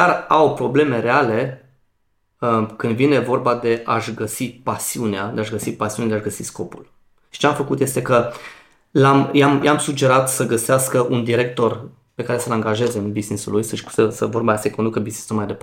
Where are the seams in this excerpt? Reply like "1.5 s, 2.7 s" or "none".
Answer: 9.6 s, 14.1 s